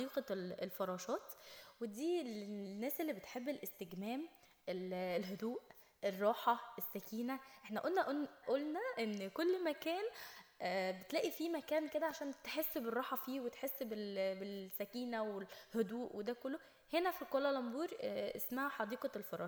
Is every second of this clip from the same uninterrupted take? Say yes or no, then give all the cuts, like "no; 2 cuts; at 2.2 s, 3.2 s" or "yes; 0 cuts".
no; 1 cut; at 8.4 s